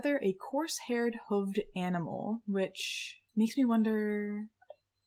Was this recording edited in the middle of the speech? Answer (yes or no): yes